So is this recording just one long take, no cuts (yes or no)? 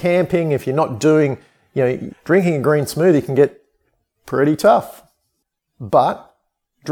no